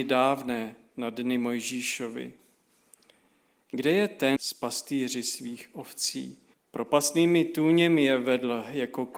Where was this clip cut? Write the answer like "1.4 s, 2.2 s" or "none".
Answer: 4.4 s, 6.5 s

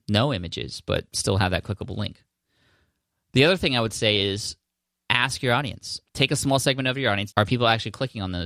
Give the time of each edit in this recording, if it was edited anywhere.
6.1 s, 7.3 s

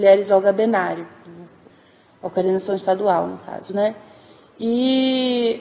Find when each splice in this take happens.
none

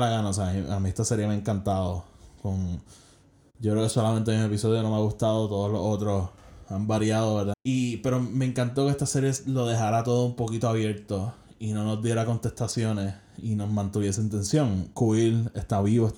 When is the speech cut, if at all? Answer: 7.5 s

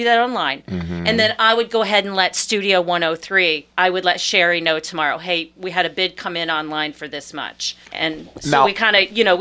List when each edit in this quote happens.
3.7 s, 7.8 s

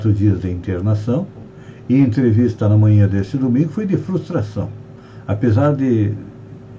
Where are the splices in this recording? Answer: none

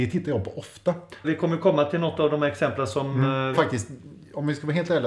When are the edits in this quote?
1.2 s, 3.5 s

